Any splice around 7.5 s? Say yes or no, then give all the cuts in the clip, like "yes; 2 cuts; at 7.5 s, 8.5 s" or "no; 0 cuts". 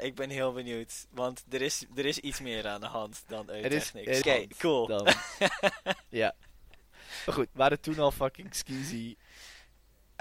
yes; 3 cuts; at 4.2 s, 7.5 s, 9.2 s